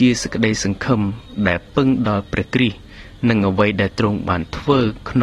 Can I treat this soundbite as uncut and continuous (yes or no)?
yes